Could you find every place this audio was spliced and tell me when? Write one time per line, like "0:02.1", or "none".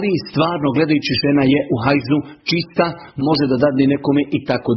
0:03.2